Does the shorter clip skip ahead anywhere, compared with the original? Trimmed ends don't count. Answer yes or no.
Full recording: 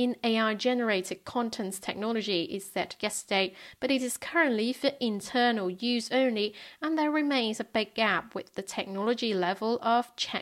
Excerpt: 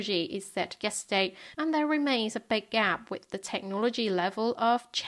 yes